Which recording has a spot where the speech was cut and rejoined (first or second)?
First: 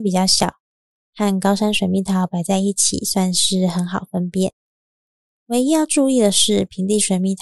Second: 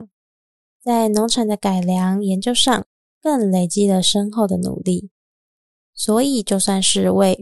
second